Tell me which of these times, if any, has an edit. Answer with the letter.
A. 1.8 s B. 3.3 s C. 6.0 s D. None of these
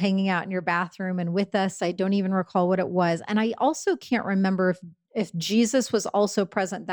A